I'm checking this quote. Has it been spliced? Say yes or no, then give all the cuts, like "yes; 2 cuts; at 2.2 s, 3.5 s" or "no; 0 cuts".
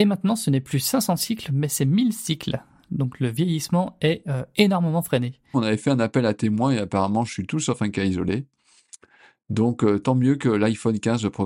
yes; 1 cut; at 5.5 s